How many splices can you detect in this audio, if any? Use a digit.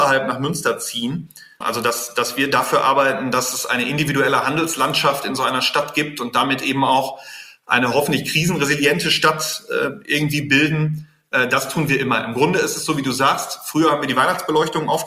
1